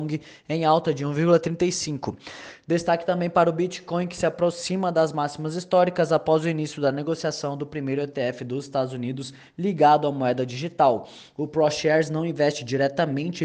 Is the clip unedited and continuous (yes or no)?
yes